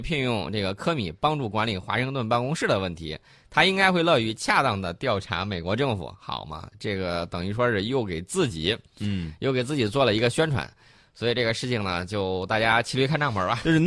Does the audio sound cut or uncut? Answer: uncut